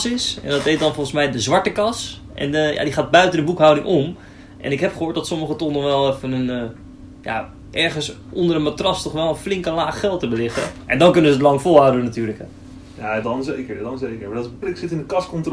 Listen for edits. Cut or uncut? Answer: cut